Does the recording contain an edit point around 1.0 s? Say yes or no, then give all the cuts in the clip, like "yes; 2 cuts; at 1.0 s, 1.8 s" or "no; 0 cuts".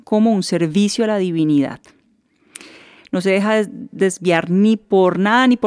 no; 1 cut; at 3.0 s